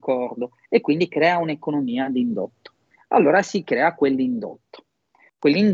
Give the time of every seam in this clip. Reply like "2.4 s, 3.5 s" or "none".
3.0 s

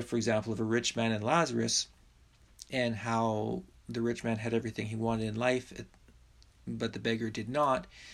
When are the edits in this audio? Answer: 2.6 s

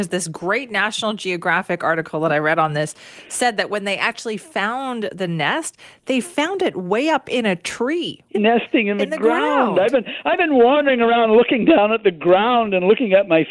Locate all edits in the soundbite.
8.3 s

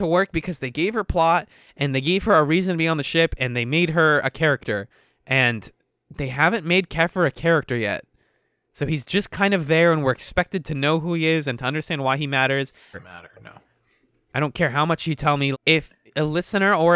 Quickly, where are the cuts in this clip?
12.9 s, 15.5 s

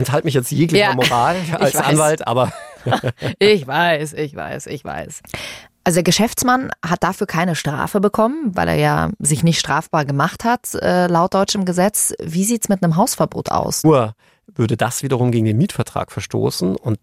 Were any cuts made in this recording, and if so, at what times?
13.8 s

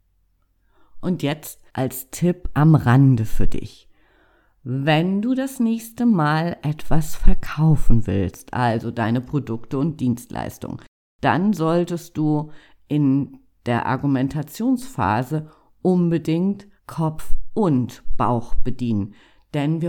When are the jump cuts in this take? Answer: 1.7 s, 16.8 s

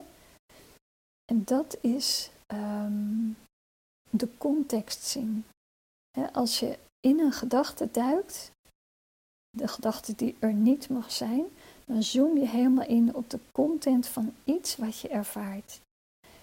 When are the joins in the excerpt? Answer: 4.0 s

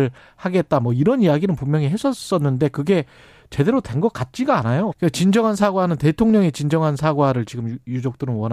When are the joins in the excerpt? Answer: 4.9 s

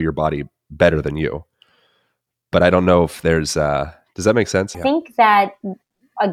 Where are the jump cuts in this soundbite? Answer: 4.7 s

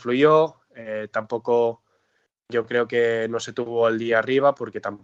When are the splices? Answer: none

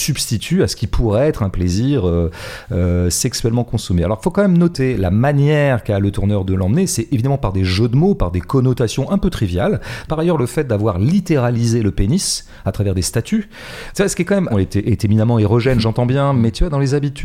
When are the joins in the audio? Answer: 10.1 s, 14.5 s

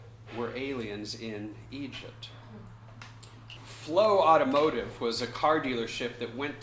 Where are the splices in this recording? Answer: 3.6 s

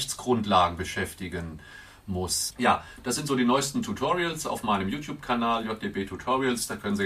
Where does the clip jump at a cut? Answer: 2.5 s

